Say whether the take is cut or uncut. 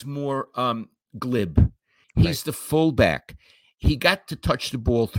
cut